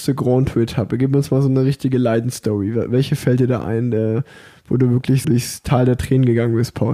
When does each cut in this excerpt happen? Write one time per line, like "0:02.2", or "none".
0:05.2